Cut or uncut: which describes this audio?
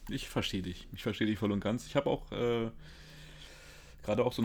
uncut